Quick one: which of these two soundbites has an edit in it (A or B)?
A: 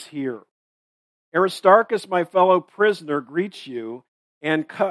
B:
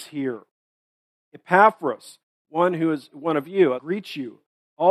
B